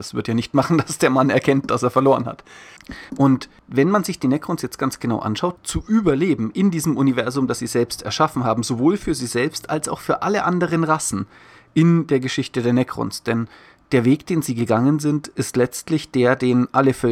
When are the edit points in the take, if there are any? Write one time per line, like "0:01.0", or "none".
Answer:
0:03.1
0:05.6